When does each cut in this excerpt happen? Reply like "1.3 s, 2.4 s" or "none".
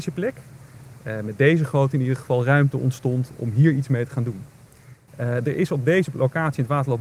5.1 s